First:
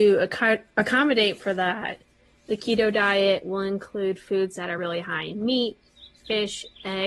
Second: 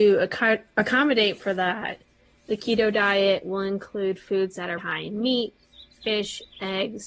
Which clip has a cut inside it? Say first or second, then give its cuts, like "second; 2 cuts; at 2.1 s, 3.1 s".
second; 1 cut; at 4.8 s